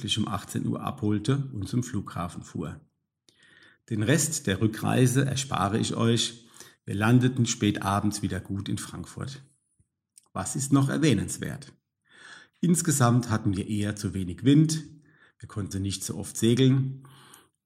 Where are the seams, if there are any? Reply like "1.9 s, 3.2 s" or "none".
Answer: 15.7 s